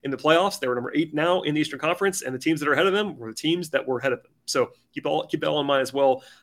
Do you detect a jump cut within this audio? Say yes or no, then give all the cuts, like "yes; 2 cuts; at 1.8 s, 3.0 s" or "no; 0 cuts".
no; 0 cuts